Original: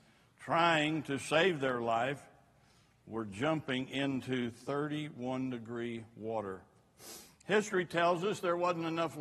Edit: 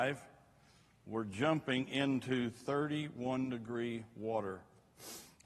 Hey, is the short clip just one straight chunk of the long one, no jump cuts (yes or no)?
yes